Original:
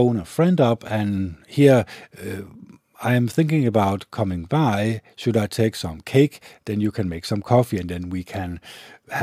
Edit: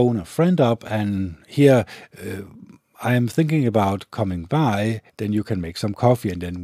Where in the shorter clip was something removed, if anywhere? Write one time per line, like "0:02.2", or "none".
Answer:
0:05.1